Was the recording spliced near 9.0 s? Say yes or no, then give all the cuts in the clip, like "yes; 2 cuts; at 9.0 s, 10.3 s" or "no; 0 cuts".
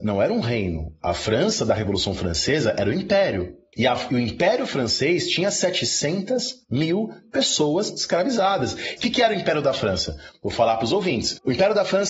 yes; 1 cut; at 9.0 s